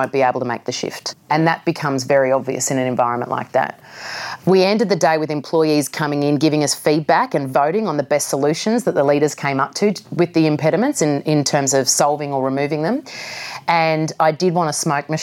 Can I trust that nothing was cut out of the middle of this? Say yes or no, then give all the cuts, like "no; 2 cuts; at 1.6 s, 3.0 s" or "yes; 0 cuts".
yes; 0 cuts